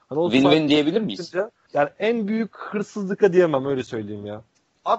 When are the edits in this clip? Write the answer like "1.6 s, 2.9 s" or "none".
1.6 s